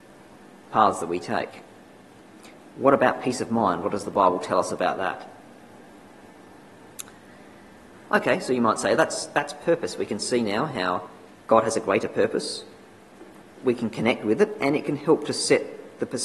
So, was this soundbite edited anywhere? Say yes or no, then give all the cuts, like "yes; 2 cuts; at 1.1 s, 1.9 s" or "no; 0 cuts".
yes; 1 cut; at 7.9 s